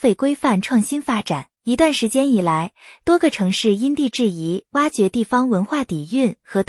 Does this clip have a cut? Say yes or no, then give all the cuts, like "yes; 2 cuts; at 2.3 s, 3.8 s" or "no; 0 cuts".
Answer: yes; 1 cut; at 1.5 s